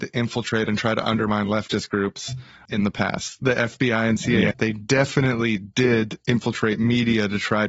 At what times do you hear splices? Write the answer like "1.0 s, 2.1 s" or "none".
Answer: 4.5 s